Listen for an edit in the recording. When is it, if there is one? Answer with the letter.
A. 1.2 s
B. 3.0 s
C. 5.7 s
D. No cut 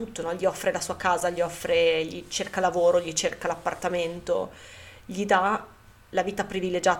D